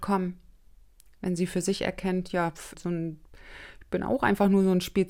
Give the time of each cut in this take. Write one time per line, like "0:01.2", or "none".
0:02.7